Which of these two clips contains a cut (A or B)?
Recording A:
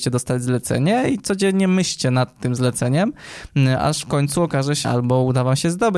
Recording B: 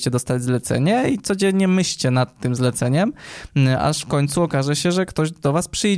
A